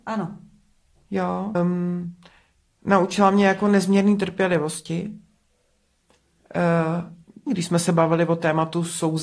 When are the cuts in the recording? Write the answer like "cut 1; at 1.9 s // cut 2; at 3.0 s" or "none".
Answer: cut 1; at 1.5 s // cut 2; at 7.5 s